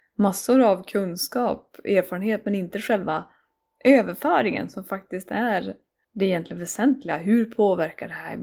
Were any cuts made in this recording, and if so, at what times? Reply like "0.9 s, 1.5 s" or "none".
none